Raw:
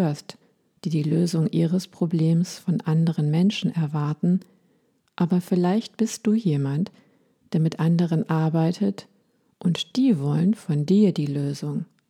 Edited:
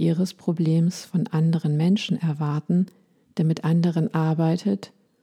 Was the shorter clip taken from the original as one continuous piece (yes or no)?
no